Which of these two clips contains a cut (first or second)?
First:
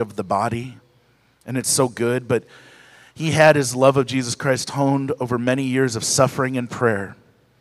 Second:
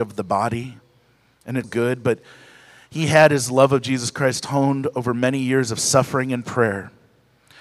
second